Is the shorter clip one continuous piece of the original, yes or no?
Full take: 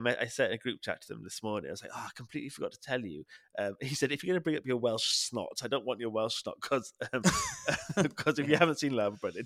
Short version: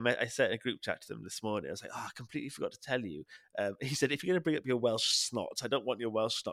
yes